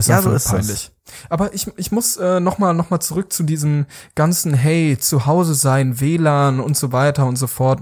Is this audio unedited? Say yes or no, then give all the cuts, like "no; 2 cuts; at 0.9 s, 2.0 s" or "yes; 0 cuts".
yes; 0 cuts